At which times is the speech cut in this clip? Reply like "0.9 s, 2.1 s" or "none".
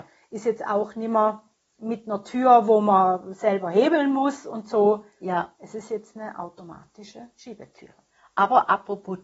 none